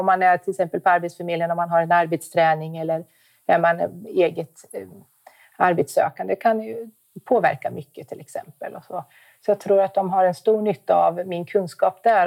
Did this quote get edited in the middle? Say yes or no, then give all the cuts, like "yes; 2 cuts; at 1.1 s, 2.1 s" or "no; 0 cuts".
no; 0 cuts